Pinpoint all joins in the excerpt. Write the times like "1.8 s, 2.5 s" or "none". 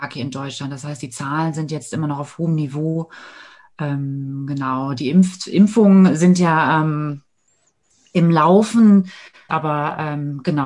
9.5 s